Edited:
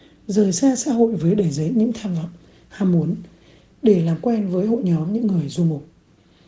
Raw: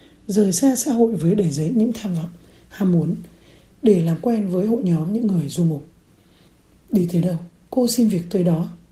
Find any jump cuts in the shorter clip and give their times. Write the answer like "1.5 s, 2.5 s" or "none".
none